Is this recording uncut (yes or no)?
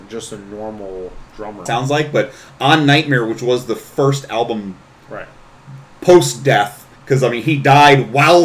no